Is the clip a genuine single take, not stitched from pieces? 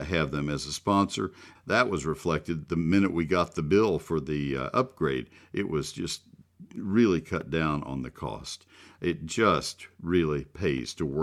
no; 1 cut; at 1.5 s

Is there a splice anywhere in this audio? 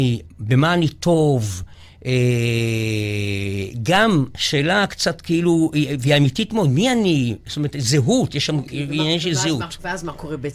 no; 0 cuts

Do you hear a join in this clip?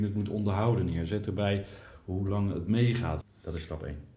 yes; 1 cut; at 3.2 s

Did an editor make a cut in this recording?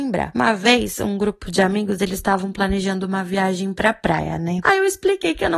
no; 0 cuts

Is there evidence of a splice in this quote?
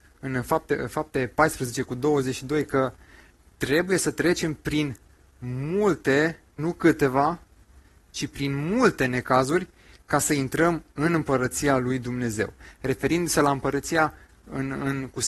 yes; 1 cut; at 6.6 s

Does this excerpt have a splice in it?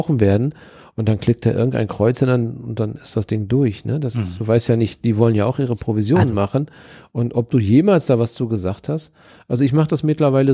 no; 0 cuts

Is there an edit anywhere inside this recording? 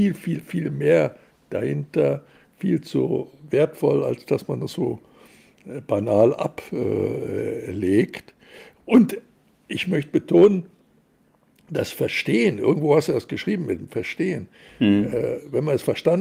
no; 0 cuts

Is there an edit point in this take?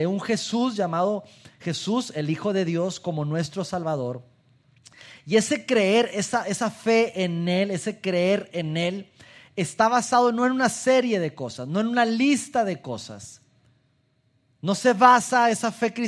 no; 0 cuts

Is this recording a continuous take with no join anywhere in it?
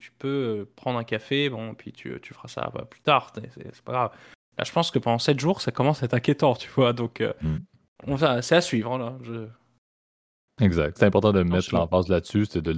no; 1 cut; at 11.0 s

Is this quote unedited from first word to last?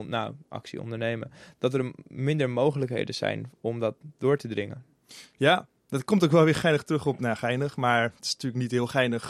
yes; 0 cuts

